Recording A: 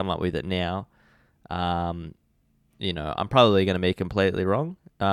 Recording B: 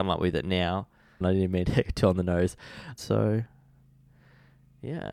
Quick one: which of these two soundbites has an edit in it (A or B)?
B